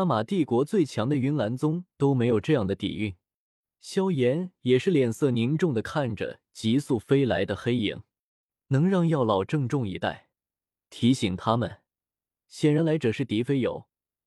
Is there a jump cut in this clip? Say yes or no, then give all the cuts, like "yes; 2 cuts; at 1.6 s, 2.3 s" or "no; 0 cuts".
no; 0 cuts